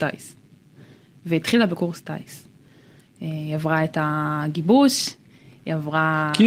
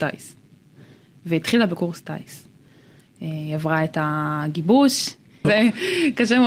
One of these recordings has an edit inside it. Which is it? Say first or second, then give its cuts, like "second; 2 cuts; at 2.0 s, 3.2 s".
second; 1 cut; at 5.4 s